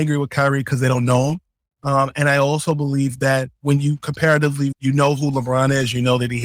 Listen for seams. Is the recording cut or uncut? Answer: cut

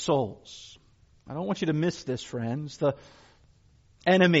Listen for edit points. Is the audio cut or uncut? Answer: cut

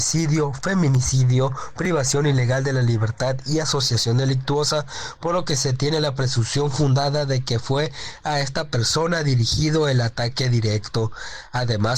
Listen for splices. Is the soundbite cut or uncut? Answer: uncut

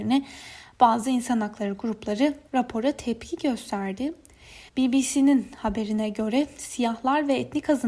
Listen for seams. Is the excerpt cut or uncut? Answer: cut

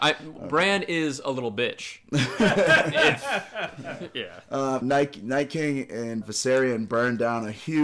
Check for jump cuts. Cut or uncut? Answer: cut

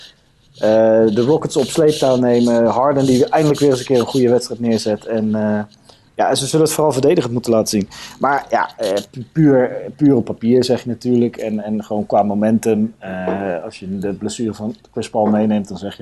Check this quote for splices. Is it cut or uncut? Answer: uncut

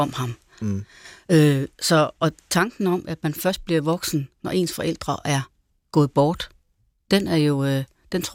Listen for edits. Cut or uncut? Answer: uncut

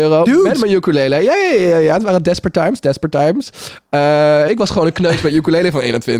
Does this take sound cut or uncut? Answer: cut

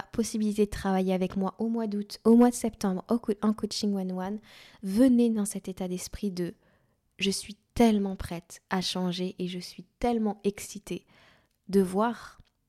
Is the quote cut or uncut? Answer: uncut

